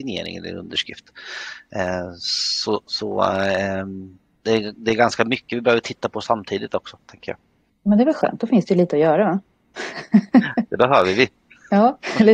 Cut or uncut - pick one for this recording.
uncut